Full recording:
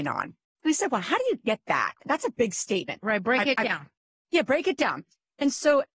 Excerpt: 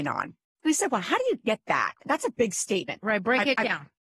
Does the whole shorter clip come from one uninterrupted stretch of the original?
yes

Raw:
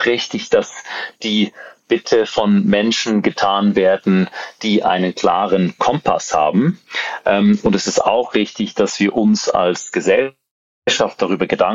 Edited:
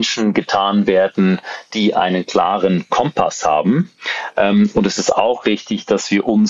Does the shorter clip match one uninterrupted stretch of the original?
yes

